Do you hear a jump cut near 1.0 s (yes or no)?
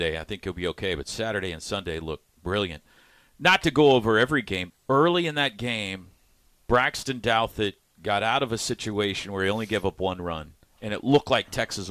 no